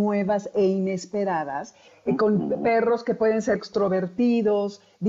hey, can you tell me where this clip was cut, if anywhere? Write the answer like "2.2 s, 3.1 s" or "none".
3.6 s